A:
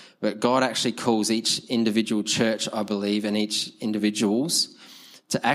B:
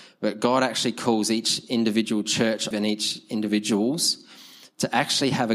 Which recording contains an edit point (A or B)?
B